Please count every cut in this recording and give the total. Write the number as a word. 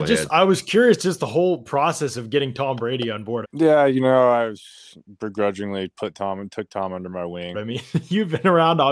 two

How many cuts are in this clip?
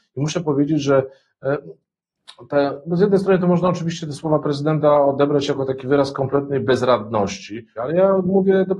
one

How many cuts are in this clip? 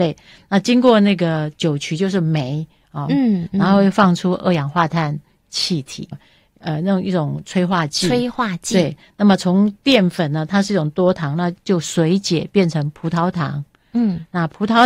two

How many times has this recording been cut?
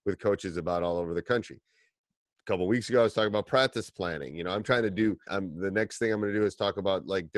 one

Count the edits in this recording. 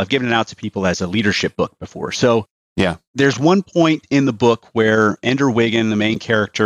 zero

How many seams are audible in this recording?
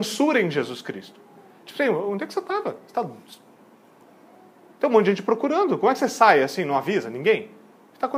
zero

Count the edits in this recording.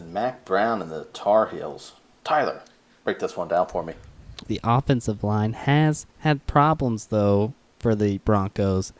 two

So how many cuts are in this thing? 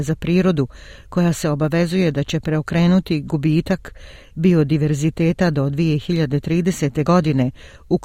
zero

